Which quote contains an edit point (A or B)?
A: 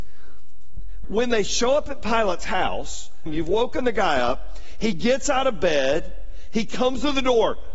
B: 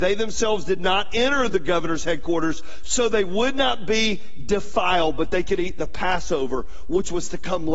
A